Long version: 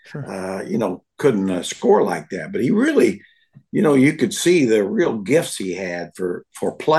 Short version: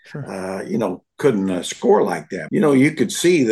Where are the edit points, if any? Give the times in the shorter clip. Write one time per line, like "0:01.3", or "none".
0:02.5